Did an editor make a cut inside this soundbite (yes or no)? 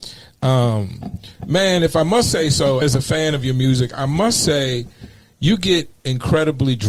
yes